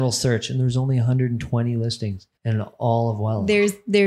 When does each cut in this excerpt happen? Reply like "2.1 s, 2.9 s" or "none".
2.4 s